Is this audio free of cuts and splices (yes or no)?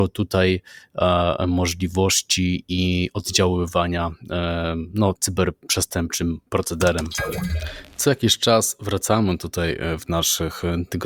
no